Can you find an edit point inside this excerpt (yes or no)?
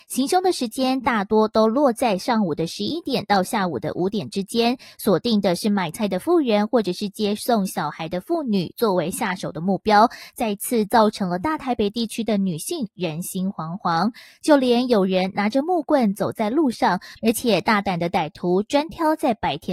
yes